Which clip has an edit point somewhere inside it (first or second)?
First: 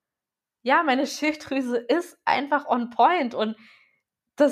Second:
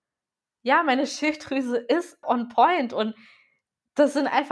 second